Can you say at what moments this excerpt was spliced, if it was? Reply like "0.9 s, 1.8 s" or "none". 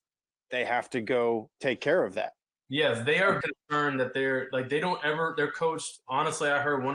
3.4 s